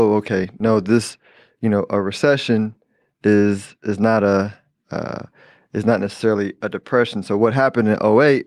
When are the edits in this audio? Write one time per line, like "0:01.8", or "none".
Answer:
none